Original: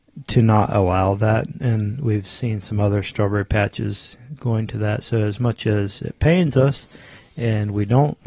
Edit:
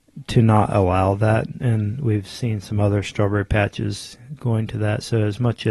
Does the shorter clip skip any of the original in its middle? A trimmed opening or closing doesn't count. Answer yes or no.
no